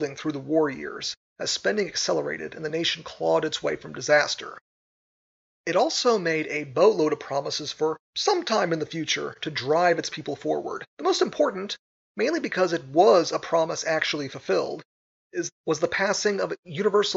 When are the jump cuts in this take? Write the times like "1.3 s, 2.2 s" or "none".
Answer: 5.5 s, 10.9 s